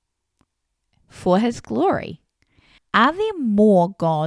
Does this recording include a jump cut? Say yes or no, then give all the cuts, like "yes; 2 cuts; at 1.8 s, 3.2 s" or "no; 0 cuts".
yes; 1 cut; at 2.8 s